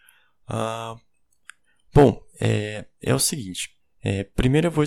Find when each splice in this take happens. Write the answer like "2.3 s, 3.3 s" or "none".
3.8 s